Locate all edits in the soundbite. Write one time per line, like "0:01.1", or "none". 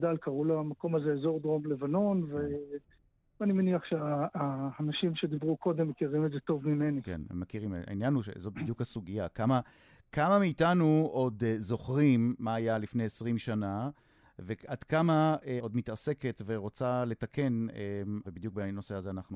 0:15.6
0:18.2